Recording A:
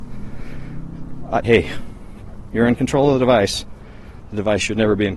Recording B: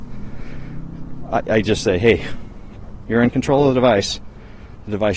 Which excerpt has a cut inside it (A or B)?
A